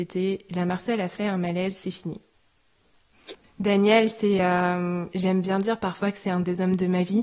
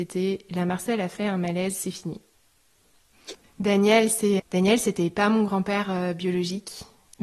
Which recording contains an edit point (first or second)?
second